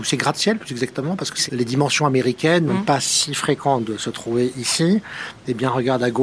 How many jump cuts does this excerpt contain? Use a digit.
2